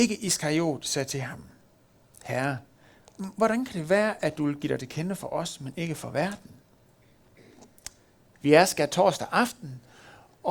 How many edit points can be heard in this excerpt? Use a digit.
1